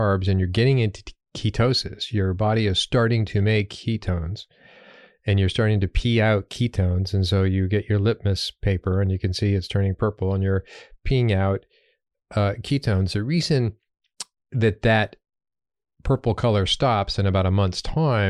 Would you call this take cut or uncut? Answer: uncut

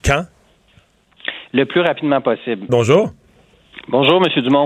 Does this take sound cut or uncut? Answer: cut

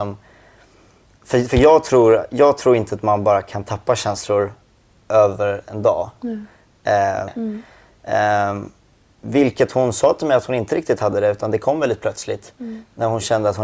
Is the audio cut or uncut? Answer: cut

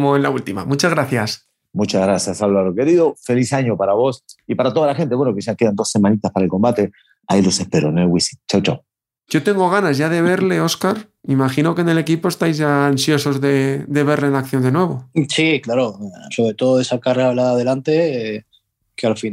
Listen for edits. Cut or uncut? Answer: uncut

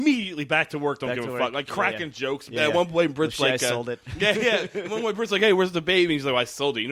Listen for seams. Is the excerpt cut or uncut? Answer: uncut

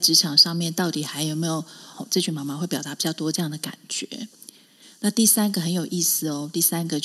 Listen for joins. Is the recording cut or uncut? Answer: cut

